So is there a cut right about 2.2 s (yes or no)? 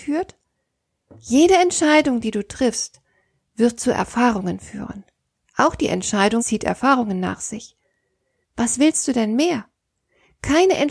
no